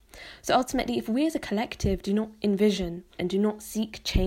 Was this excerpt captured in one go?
no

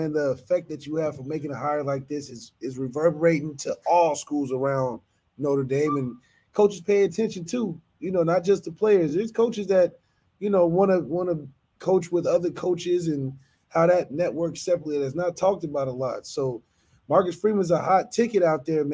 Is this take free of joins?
yes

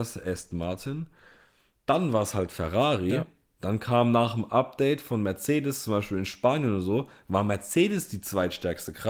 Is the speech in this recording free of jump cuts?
yes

